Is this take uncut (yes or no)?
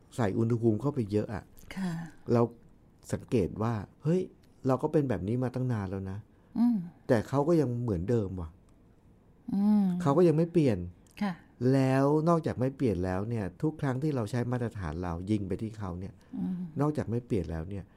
no